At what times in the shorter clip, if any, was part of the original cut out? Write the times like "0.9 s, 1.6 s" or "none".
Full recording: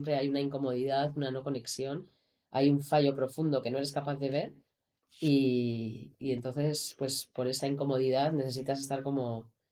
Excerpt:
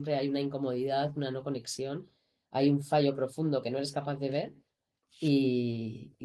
none